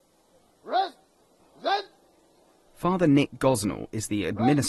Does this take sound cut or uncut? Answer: cut